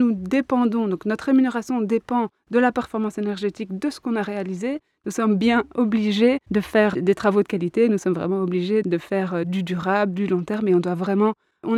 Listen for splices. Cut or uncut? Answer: uncut